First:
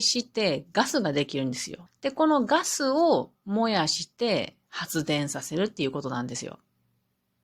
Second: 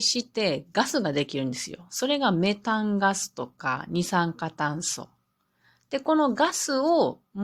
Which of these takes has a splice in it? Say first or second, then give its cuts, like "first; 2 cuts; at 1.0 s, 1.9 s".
first; 1 cut; at 1.9 s